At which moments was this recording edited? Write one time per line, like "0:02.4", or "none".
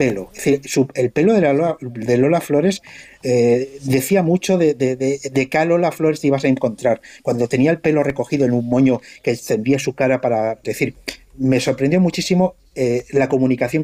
0:10.6

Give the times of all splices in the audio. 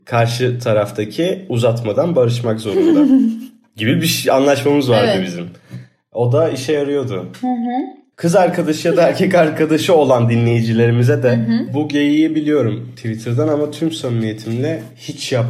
0:08.1
0:11.7

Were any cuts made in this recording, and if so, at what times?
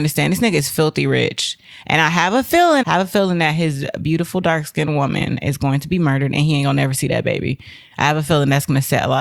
0:02.8

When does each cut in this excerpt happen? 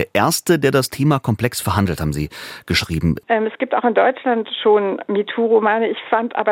0:03.2

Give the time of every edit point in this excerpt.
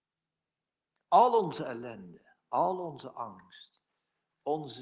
none

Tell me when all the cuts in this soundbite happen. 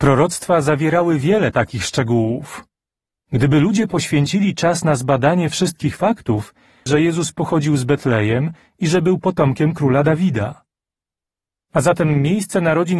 0:06.9

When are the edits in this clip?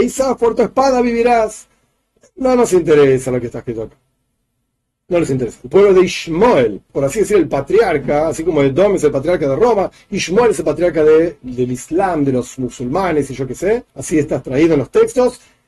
0:06.9
0:13.9

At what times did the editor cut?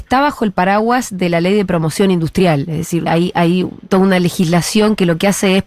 0:03.1

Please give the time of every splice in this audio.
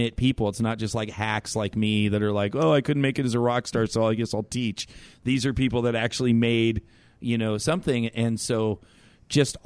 none

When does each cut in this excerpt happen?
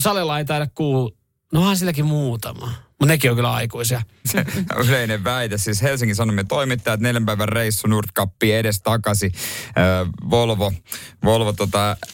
0:04.2

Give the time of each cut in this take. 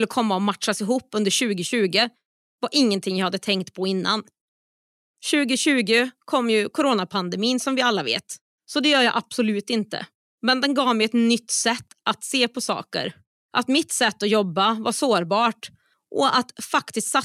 0:08.5

